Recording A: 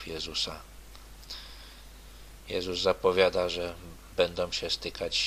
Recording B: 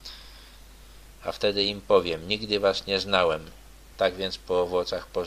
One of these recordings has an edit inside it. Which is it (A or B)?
B